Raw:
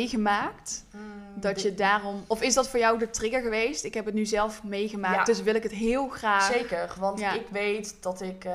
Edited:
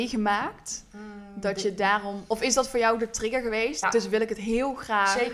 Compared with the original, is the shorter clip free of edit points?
no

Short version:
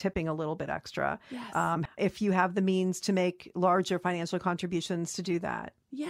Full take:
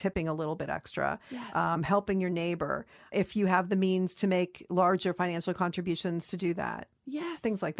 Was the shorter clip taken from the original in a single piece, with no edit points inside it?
no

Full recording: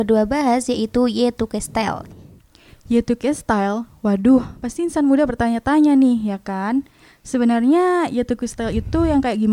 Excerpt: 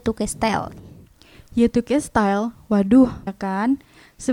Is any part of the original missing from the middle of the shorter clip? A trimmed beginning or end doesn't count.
yes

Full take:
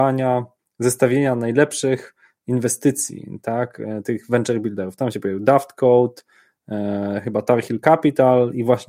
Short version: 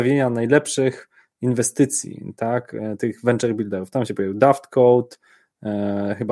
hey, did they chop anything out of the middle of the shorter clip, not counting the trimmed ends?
no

